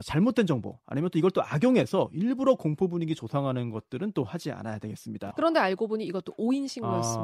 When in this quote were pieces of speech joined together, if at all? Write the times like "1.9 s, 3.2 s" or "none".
5.3 s